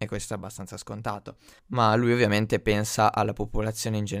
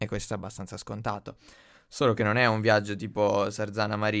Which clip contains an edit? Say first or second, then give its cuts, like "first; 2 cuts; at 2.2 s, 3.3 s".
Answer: first; 1 cut; at 1.6 s